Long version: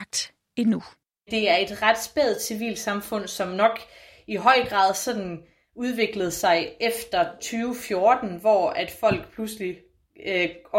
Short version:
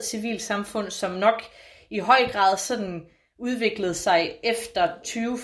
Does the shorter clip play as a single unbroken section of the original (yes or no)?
yes